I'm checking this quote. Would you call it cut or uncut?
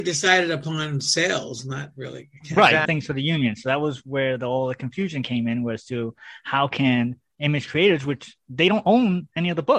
cut